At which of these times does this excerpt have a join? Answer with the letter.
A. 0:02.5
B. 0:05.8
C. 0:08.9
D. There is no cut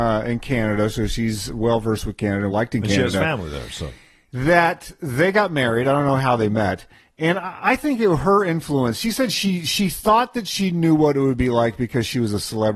A